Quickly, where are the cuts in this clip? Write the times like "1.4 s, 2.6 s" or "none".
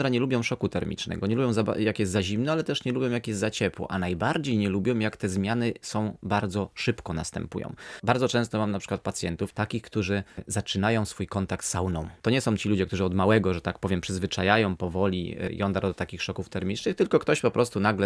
none